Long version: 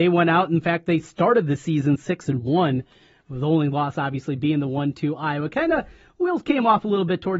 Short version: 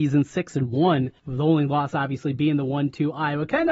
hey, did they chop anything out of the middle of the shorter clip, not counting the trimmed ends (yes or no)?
yes